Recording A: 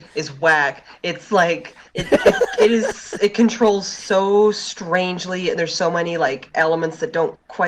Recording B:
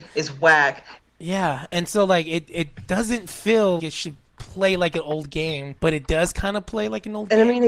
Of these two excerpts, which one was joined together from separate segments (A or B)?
B